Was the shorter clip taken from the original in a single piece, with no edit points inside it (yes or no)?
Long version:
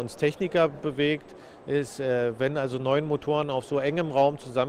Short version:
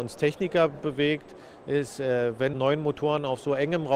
no